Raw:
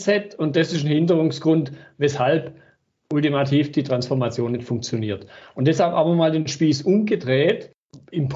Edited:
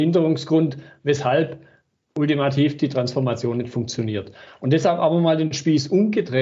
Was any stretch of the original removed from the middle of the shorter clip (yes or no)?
no